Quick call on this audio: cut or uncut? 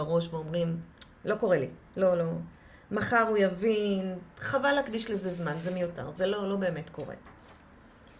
uncut